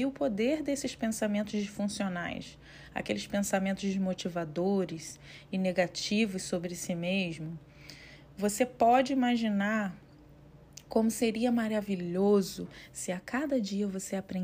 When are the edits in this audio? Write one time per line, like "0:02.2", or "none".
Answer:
none